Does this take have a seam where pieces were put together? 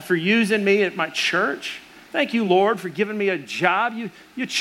no; 0 cuts

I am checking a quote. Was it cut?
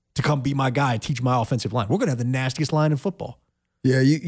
no; 0 cuts

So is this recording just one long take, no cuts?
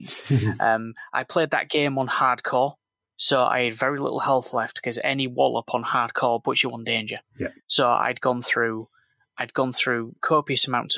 yes; 0 cuts

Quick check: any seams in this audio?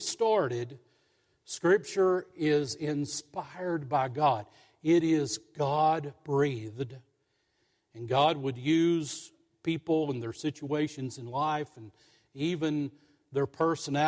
no; 0 cuts

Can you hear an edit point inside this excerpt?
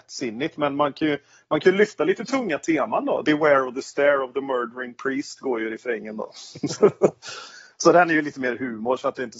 yes; 1 cut; at 3.2 s

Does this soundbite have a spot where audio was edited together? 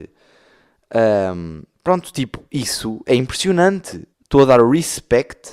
yes; 1 cut; at 4.1 s

